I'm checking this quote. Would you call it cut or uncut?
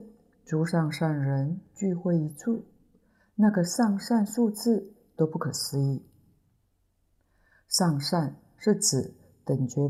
uncut